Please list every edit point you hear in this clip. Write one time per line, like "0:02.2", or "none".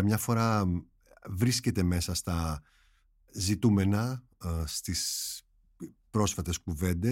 none